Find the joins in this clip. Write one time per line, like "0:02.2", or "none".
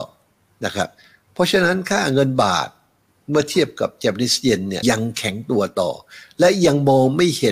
0:04.8